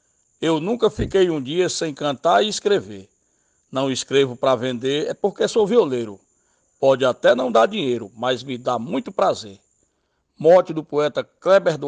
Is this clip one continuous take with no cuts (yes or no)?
yes